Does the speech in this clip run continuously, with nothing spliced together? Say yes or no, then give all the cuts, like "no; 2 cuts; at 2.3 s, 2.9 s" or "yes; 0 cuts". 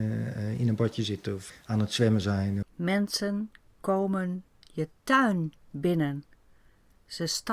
no; 2 cuts; at 1.5 s, 2.6 s